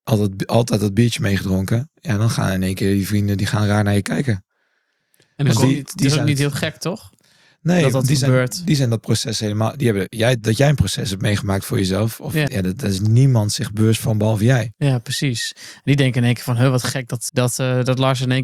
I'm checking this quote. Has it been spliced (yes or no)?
yes